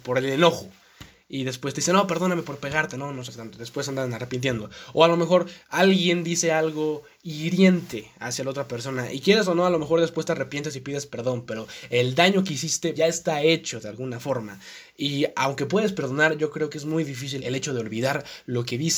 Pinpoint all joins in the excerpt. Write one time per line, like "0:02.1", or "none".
0:13.0
0:17.4